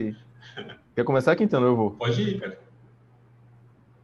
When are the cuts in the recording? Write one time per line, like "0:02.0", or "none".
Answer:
0:02.4